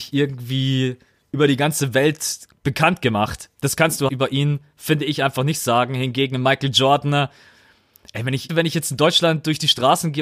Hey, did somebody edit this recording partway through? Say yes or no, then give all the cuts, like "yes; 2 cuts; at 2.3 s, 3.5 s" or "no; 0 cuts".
yes; 2 cuts; at 4.1 s, 8.5 s